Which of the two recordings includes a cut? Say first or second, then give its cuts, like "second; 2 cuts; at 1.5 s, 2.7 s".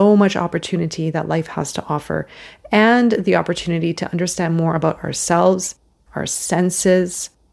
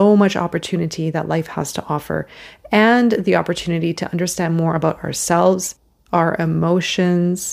second; 1 cut; at 6.0 s